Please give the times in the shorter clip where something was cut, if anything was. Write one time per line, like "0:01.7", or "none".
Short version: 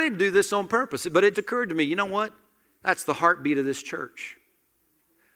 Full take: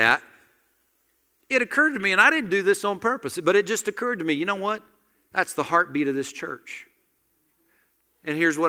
0:01.3